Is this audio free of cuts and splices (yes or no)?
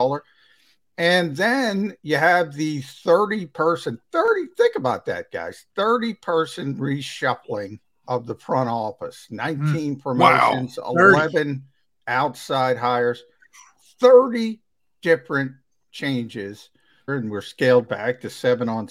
no